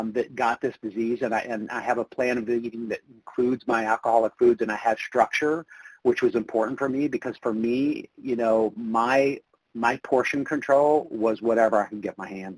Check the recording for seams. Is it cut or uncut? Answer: uncut